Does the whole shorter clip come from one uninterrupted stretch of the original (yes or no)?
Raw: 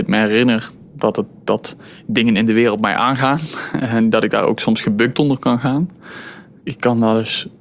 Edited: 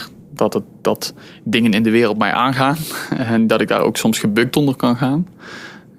yes